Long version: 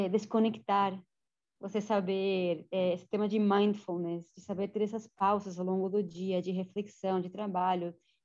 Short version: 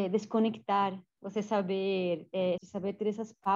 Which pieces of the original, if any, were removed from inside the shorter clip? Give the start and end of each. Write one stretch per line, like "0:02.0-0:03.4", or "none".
0:01.1-0:01.5
0:03.0-0:04.3